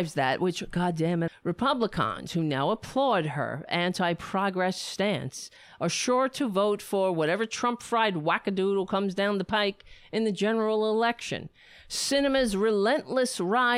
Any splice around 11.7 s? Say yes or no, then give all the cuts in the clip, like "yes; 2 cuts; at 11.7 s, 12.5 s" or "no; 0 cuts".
no; 1 cut; at 1.3 s